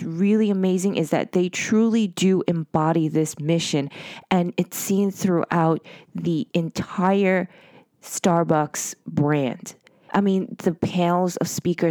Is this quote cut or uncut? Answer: cut